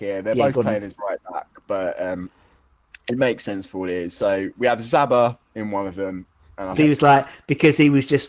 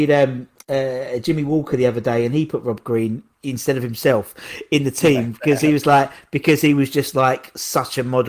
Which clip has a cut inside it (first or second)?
first